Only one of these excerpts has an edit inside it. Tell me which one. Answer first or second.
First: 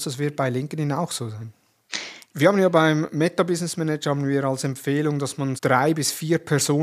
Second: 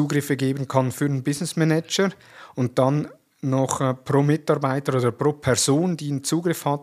first